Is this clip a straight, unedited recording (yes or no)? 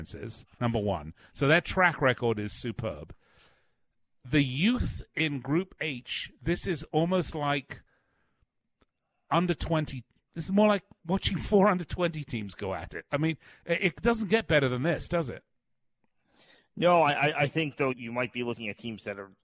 no